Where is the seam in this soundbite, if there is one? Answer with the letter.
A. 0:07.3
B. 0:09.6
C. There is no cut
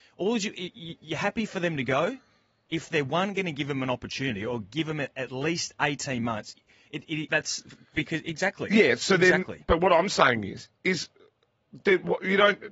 A